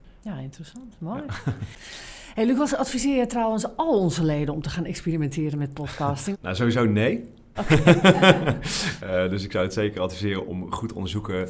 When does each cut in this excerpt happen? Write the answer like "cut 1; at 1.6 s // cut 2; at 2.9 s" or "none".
cut 1; at 6.3 s // cut 2; at 7.5 s // cut 3; at 10.5 s